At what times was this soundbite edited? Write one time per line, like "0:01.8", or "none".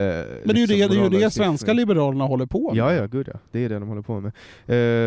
none